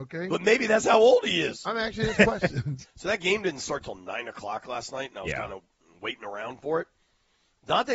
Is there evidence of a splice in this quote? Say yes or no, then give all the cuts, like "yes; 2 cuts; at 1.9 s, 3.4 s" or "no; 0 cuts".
yes; 1 cut; at 2.8 s